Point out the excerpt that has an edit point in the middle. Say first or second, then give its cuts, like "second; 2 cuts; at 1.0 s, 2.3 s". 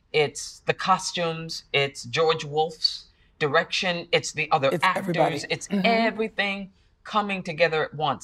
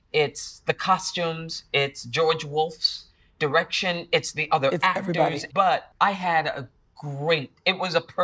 second; 1 cut; at 5.5 s